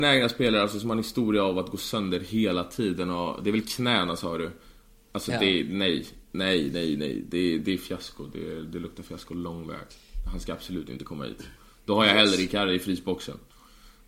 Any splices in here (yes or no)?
no